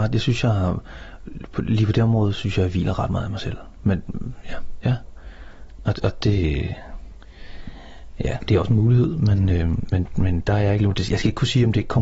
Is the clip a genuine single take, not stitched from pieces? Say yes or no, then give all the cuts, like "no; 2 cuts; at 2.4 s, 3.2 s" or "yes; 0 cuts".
no; 1 cut; at 4.8 s